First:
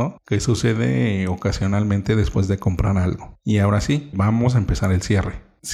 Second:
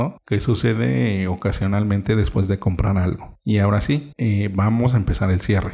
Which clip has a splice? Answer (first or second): first